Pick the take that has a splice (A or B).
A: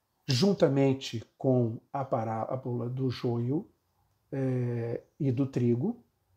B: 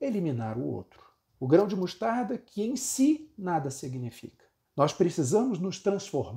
B